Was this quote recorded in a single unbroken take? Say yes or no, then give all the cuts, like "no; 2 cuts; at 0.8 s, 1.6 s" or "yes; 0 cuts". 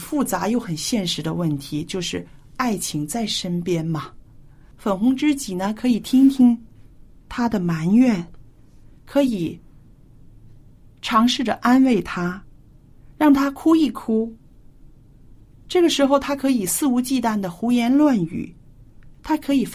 no; 1 cut; at 4.7 s